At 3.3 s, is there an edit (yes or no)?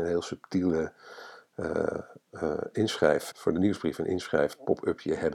yes